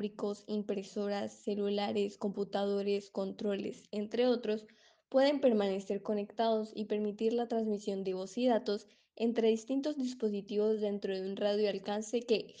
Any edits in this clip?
no; 0 cuts

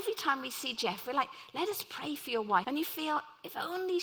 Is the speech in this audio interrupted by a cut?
yes; 1 cut; at 2.6 s

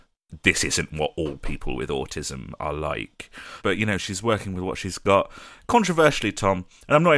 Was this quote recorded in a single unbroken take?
no; 1 cut; at 3.6 s

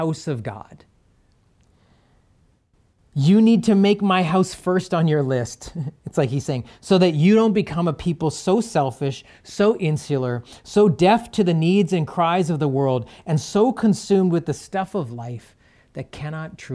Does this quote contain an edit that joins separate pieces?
no; 0 cuts

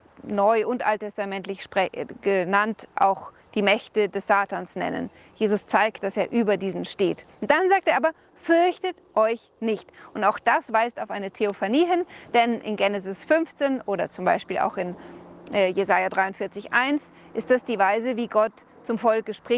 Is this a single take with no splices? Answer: yes; 0 cuts

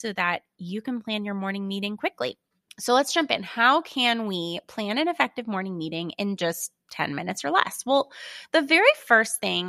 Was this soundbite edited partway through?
no; 0 cuts

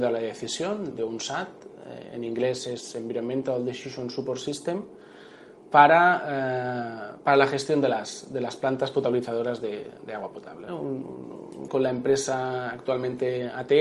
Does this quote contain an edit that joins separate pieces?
yes; 3 cuts; at 0.9 s, 10.7 s, 11.7 s

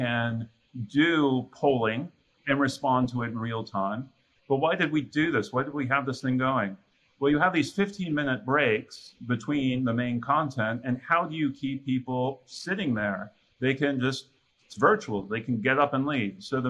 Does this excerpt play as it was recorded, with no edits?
no; 1 cut; at 4.4 s

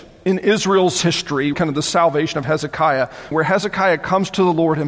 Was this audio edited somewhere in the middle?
yes; 2 cuts; at 1.5 s, 3.3 s

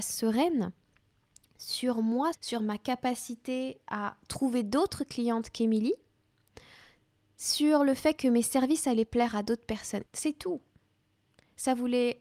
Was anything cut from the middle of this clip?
yes; 2 cuts; at 2.3 s, 10.1 s

